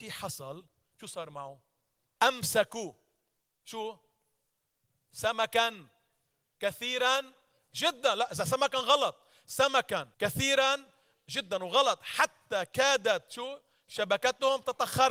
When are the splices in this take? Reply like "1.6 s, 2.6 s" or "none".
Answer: 2.2 s, 10.1 s